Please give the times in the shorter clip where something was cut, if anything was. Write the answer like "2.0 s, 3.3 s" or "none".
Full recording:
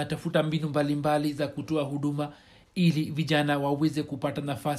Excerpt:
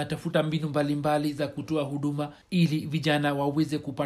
2.4 s